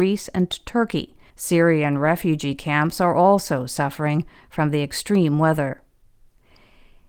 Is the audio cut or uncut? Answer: cut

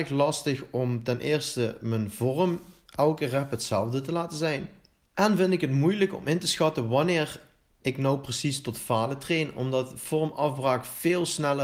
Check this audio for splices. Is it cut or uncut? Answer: uncut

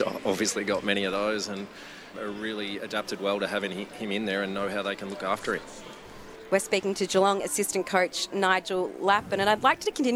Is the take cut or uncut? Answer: cut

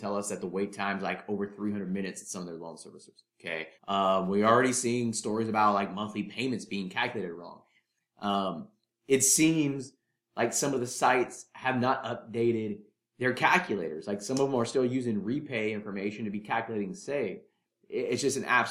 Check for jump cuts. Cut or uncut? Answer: cut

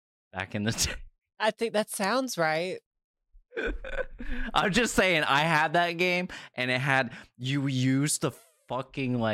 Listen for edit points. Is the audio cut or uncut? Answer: uncut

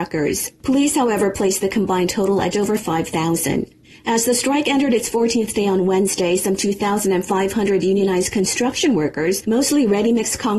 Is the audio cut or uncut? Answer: cut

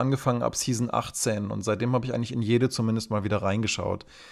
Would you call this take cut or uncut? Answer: uncut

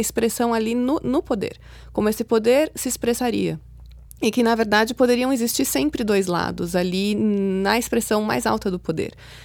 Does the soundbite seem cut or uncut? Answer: uncut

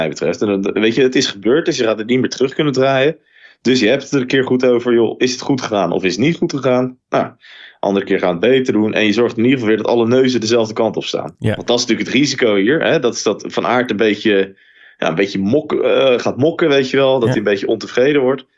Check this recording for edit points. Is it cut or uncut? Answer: uncut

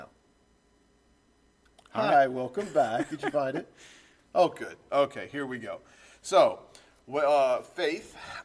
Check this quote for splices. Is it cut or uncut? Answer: uncut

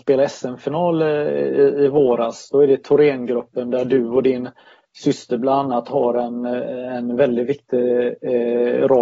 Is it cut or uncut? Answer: uncut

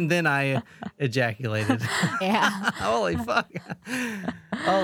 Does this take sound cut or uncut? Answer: cut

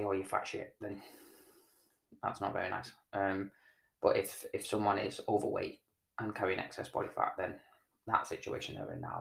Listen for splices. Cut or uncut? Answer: uncut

